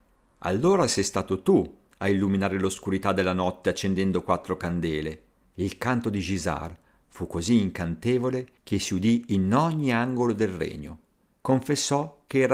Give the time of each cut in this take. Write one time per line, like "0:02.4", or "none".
0:05.4
0:08.6
0:11.4

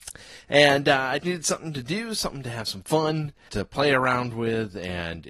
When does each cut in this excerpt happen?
0:01.2
0:03.5

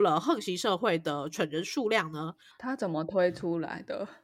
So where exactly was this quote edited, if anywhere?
0:02.5

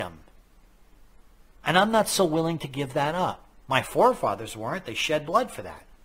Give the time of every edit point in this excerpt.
none

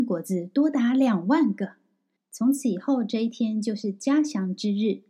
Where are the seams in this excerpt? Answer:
0:02.2

